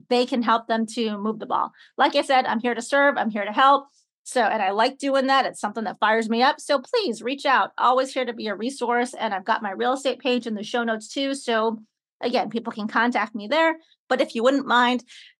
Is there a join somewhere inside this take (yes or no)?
no